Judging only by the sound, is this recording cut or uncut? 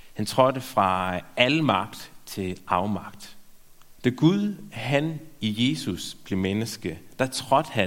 cut